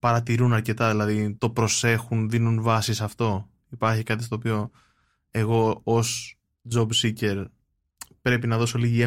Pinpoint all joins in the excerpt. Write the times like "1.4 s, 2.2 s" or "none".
1.4 s